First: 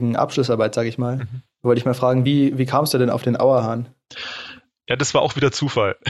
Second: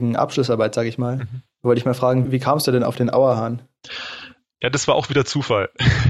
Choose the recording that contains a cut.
second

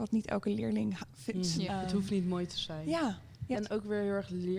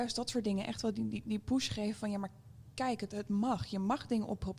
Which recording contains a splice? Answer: first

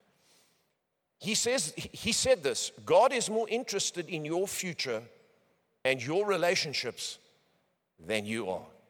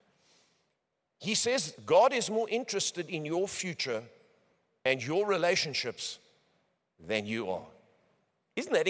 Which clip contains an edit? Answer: second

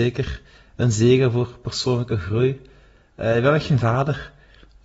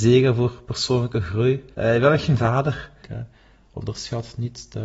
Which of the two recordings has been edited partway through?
second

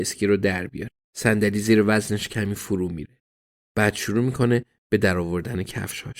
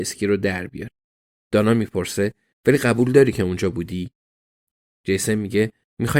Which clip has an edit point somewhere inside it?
first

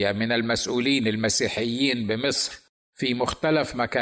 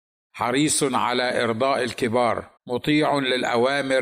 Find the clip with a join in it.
second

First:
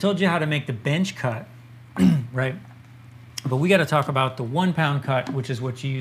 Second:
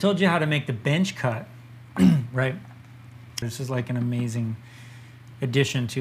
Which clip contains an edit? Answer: second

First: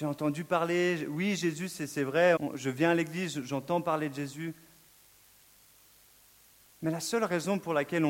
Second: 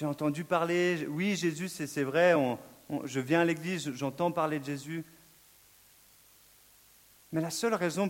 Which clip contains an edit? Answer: first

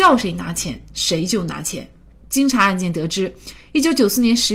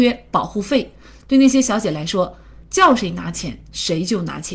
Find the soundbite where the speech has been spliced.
second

